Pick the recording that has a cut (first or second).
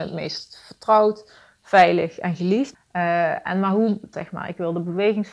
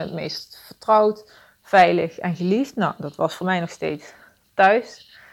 first